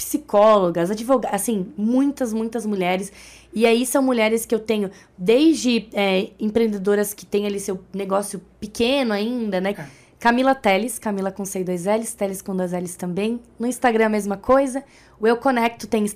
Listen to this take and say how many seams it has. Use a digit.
1